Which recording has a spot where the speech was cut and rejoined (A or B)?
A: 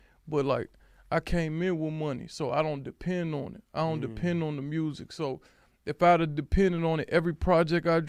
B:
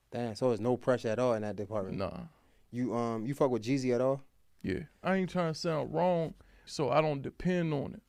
B